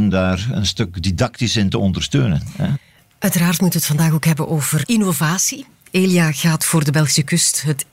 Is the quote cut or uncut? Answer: uncut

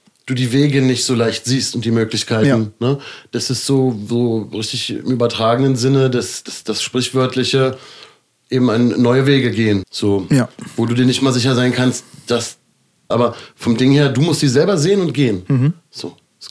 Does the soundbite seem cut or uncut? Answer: cut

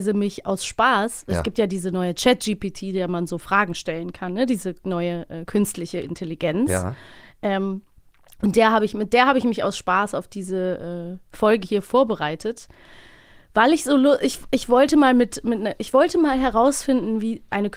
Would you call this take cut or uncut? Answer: uncut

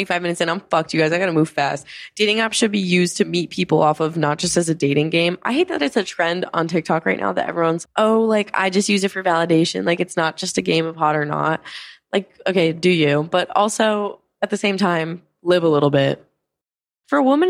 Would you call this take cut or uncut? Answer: cut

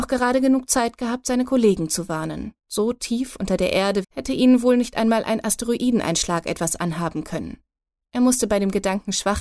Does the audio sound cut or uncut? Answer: cut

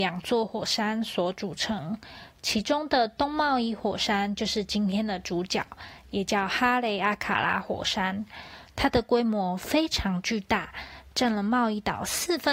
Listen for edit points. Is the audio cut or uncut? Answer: uncut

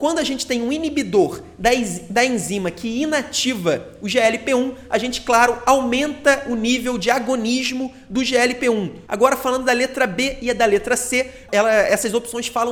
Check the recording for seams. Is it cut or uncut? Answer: cut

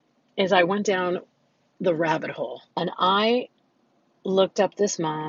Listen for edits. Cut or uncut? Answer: cut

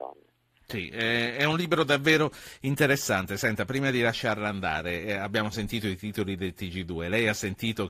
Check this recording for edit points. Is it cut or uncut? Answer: uncut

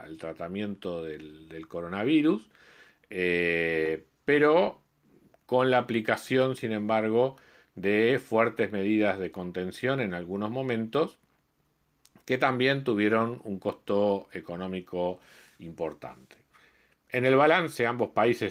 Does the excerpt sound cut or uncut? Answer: uncut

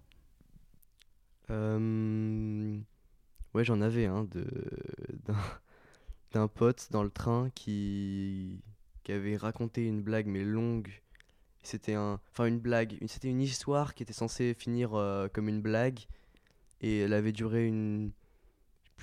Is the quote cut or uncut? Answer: uncut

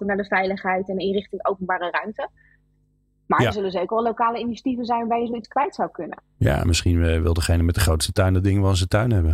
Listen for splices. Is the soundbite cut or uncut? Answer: uncut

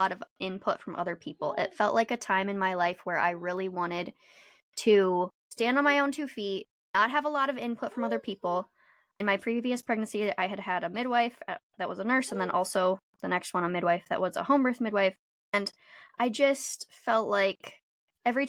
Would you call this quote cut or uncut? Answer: uncut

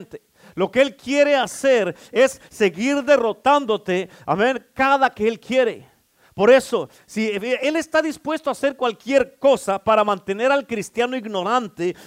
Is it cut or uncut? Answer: uncut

